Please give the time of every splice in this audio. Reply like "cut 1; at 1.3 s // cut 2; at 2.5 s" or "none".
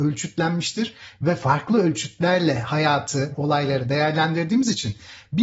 cut 1; at 3.3 s